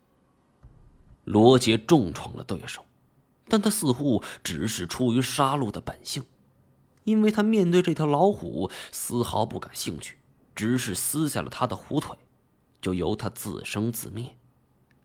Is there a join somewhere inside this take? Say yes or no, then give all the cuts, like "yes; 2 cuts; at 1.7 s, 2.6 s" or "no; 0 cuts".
yes; 1 cut; at 1.1 s